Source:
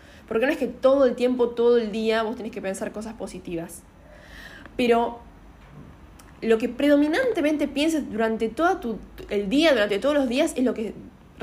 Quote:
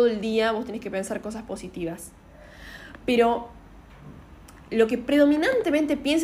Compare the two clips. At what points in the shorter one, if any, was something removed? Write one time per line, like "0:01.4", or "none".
none